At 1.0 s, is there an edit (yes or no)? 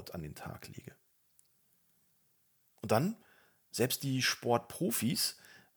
no